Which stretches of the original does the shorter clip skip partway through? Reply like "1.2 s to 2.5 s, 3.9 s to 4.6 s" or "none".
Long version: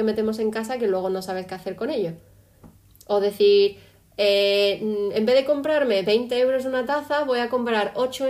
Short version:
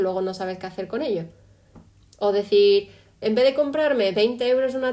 4.1 s to 5.1 s